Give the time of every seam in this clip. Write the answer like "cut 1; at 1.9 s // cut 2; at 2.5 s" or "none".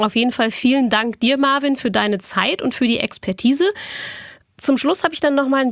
cut 1; at 4.4 s